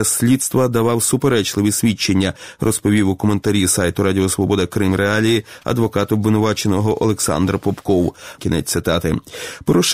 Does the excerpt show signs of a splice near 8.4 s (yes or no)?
yes